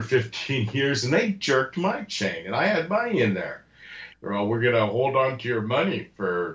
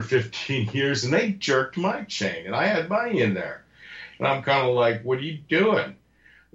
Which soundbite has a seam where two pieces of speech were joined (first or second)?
first